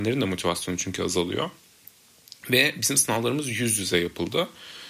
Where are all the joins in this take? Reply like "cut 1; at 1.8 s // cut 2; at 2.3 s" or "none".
none

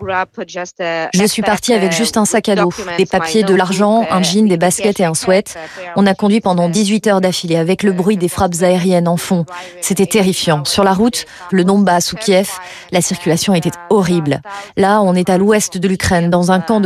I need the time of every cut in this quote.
cut 1; at 11.5 s

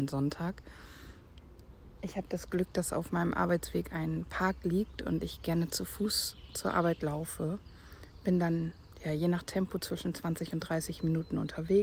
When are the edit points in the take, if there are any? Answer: cut 1; at 2.0 s

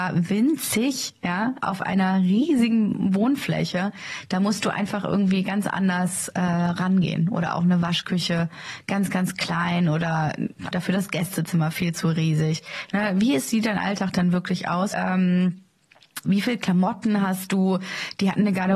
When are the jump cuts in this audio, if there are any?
cut 1; at 10.7 s // cut 2; at 14.9 s // cut 3; at 16.2 s

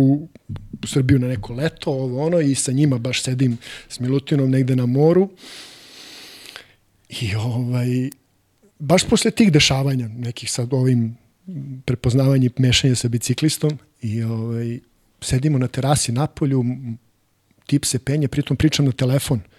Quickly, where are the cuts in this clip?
none

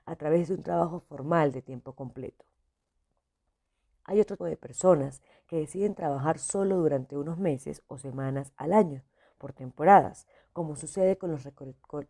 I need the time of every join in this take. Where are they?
cut 1; at 4.4 s

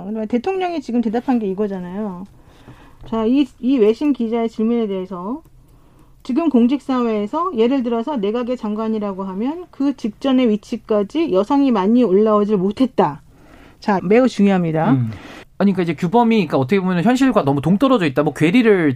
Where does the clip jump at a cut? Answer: cut 1; at 14.0 s // cut 2; at 15.4 s

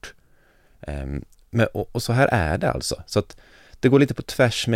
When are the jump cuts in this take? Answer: none

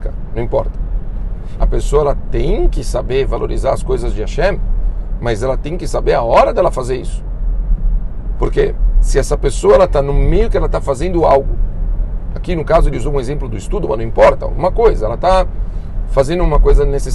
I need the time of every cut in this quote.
cut 1; at 1.6 s

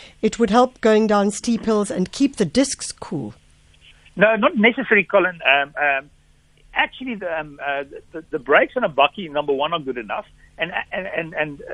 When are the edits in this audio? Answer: none

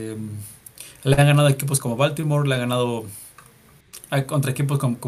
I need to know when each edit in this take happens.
cut 1; at 1.8 s

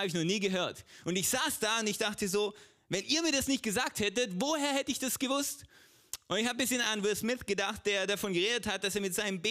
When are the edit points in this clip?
none

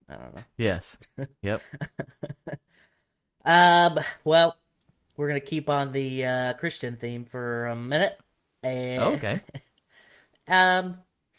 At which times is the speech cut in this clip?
none

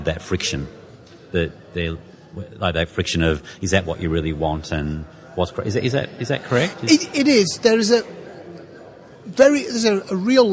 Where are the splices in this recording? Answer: none

